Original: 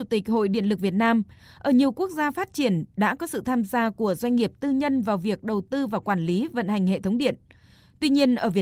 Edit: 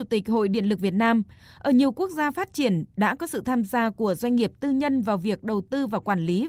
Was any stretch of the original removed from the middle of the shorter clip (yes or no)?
no